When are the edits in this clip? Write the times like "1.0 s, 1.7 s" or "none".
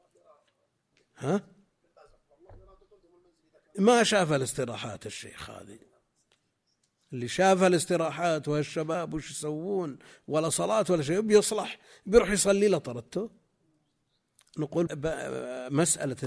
14.9 s